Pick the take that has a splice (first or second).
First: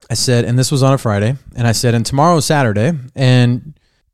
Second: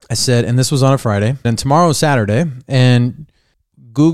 second